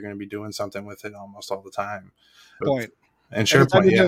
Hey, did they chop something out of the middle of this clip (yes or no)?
yes